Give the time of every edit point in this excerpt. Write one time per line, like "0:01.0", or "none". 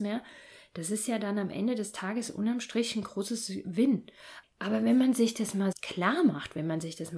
0:04.4
0:05.7